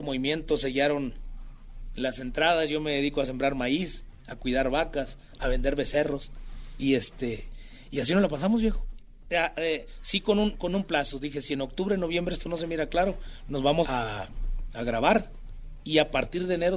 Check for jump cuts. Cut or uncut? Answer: cut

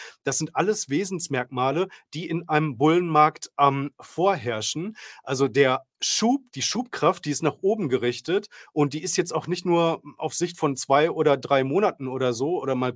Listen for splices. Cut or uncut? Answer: cut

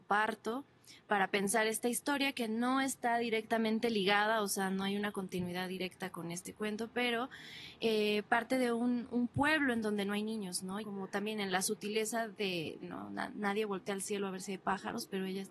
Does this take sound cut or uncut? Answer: cut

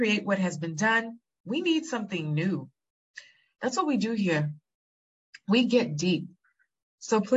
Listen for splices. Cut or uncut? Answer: cut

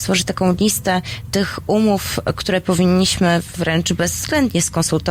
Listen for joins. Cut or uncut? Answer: uncut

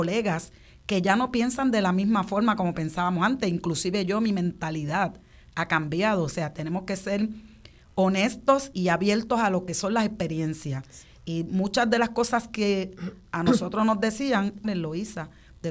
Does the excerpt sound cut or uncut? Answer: cut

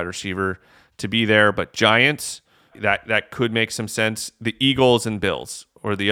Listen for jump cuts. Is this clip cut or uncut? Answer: cut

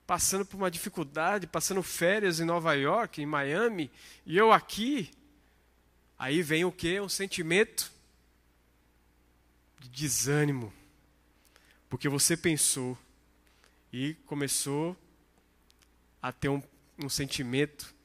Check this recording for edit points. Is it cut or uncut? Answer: uncut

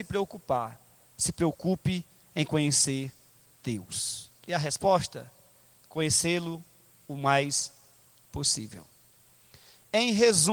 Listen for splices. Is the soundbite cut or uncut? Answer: cut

